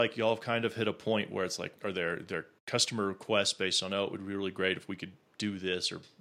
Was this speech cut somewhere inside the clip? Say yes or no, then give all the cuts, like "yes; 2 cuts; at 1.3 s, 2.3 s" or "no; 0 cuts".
yes; 1 cut; at 1.7 s